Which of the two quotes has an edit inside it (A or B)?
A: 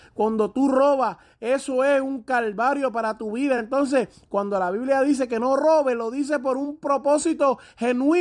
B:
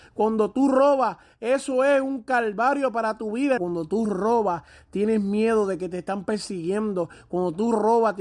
B